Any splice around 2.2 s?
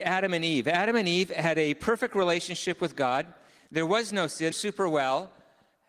no; 1 cut; at 4.5 s

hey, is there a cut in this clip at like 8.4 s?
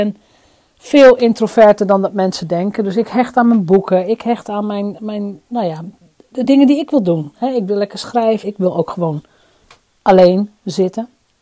yes; 1 cut; at 8.4 s

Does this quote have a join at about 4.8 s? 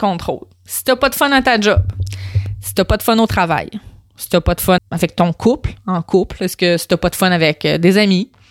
yes; 1 cut; at 4.8 s

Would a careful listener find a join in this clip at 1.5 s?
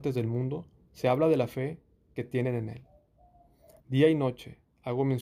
no; 1 cut; at 3.8 s

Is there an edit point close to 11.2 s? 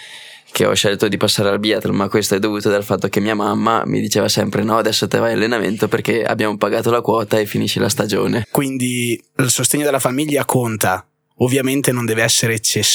no; 1 cut; at 8.4 s

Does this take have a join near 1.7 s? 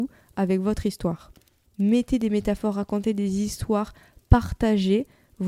yes; 1 cut; at 1.7 s

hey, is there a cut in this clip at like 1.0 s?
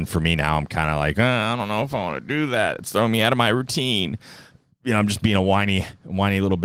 no; 0 cuts

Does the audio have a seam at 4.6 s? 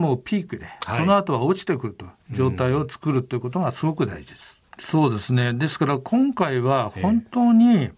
yes; 1 cut; at 4.6 s

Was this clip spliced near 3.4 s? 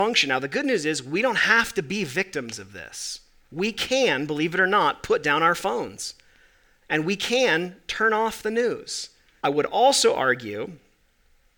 no; 1 cut; at 9.4 s

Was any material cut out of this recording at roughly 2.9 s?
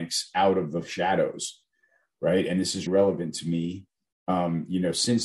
yes; 1 cut; at 2.9 s

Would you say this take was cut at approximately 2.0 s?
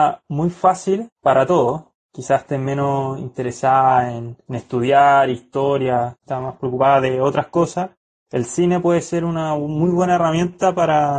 yes; 1 cut; at 2.0 s

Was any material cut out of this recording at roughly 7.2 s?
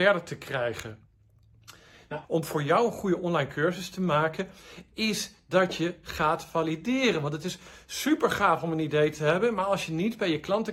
no; 1 cut; at 2.2 s

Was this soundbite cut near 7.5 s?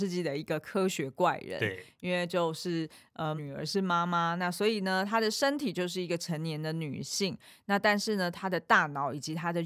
no; 1 cut; at 3.4 s

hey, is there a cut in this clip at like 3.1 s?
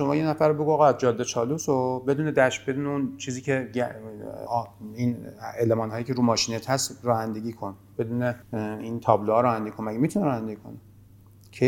no; 2 cuts; at 4.5 s, 8.4 s

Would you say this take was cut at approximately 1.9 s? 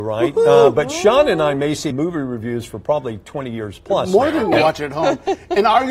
yes; 2 cuts; at 1.9 s, 4.5 s

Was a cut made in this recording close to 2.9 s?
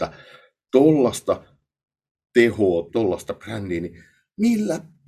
yes; 1 cut; at 2.9 s

